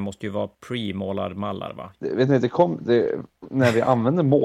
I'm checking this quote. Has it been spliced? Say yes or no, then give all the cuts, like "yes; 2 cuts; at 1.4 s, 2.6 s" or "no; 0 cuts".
yes; 1 cut; at 1.9 s